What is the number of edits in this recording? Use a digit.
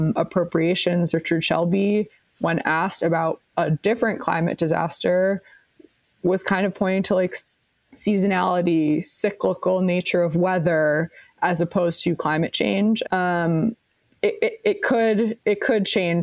1